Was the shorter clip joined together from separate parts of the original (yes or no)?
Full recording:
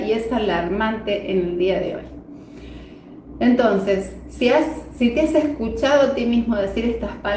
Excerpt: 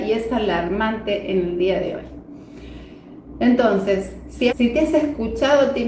yes